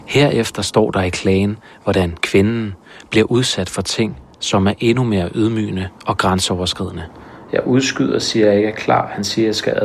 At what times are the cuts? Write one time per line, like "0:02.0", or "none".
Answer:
none